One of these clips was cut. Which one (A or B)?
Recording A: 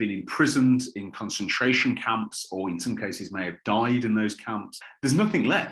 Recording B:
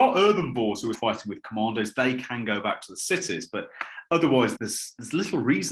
B